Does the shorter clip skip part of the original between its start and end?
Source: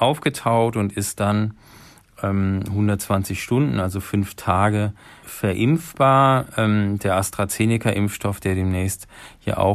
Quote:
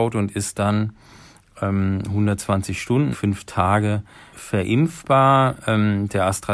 yes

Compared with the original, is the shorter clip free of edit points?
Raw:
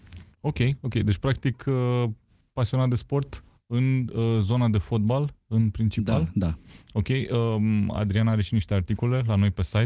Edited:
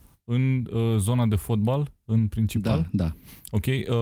yes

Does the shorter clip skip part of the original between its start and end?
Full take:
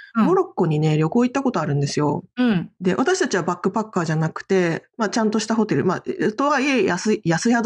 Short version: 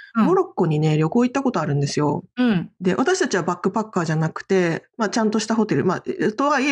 no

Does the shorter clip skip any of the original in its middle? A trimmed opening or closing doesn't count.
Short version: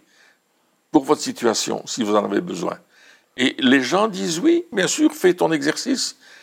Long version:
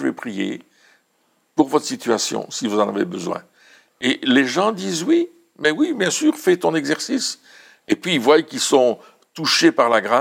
yes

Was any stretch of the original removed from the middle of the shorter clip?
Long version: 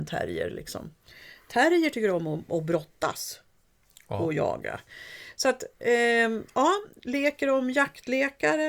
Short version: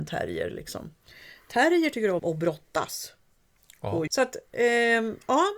yes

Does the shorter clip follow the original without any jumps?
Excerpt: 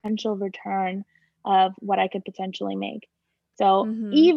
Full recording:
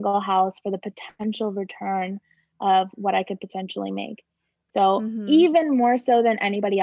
yes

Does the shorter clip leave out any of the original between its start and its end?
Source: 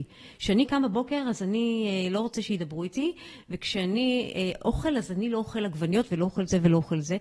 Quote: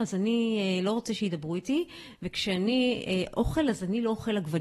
no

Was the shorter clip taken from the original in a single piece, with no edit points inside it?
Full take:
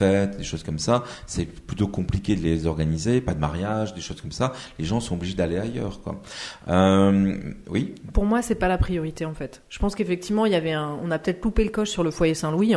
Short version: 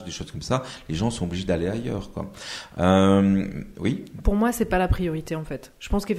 yes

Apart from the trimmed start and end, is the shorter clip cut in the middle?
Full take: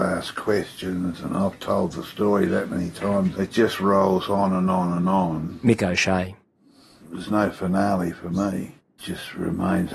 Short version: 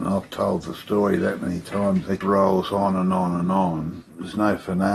yes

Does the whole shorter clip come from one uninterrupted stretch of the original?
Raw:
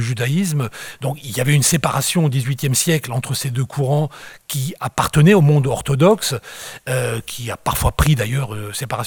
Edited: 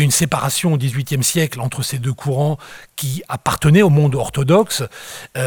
yes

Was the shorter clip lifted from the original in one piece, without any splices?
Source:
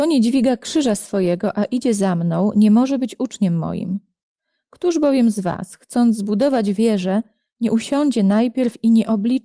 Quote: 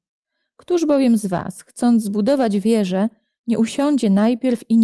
yes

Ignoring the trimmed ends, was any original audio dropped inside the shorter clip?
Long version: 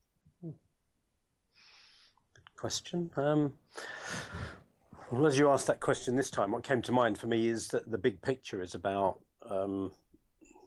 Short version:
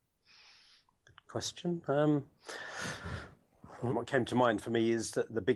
yes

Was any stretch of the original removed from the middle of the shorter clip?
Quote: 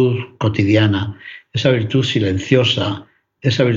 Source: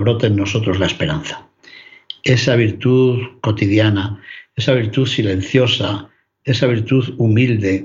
no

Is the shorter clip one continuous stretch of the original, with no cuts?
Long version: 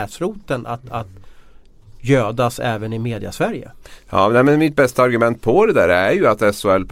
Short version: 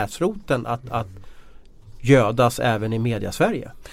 yes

